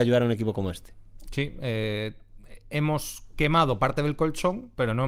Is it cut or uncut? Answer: uncut